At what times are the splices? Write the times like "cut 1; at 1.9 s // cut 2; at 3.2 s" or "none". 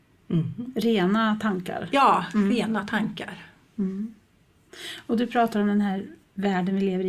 none